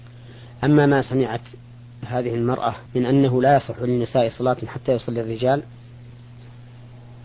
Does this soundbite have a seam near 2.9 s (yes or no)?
yes